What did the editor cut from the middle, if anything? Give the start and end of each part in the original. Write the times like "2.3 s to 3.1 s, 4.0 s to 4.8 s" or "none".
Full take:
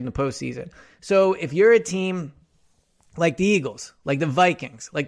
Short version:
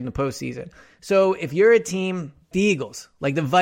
2.5 s to 3.4 s